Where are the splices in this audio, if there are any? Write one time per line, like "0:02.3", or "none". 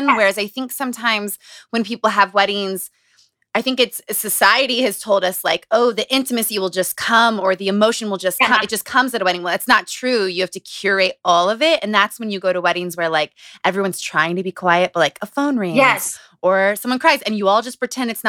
none